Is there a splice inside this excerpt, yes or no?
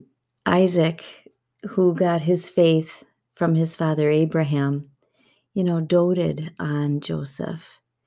no